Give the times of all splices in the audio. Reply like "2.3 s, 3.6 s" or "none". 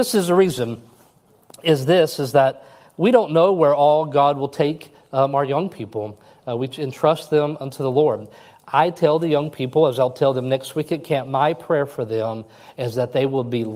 none

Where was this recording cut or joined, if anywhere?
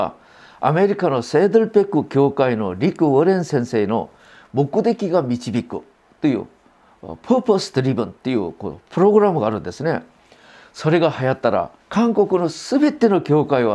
11.8 s

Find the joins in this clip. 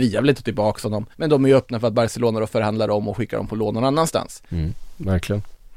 1.1 s, 4.5 s

